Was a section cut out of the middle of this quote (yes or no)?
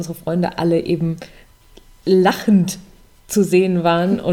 no